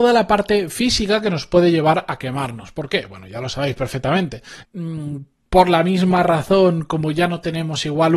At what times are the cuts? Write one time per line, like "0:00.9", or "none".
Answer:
0:04.6